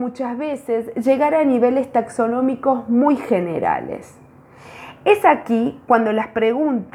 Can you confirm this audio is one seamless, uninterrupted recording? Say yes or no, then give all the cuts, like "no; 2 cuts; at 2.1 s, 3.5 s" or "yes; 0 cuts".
yes; 0 cuts